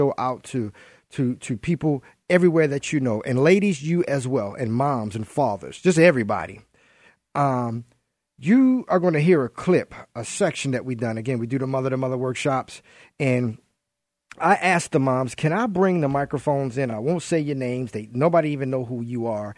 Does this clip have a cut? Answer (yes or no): no